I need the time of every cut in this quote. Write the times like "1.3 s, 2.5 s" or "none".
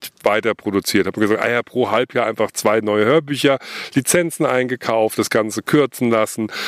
none